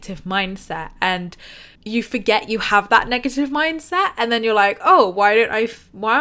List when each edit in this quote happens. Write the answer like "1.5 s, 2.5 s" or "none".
1.8 s